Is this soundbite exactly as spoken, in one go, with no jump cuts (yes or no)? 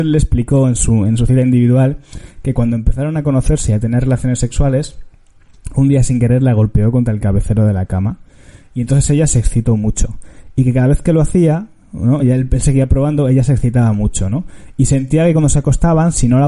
yes